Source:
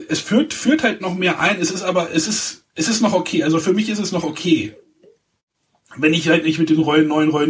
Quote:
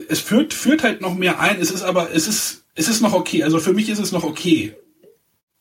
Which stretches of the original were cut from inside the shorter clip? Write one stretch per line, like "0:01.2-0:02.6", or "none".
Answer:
none